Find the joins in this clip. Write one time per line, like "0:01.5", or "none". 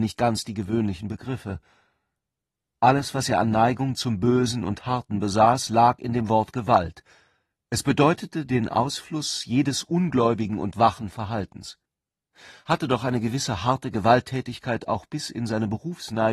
none